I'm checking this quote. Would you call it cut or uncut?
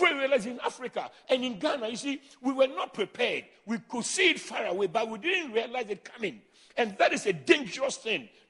uncut